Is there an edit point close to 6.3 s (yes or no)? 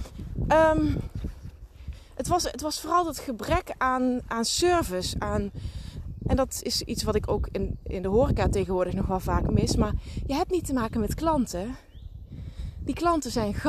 yes